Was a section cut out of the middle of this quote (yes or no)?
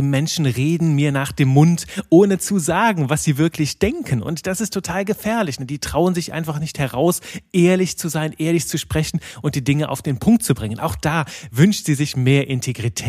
no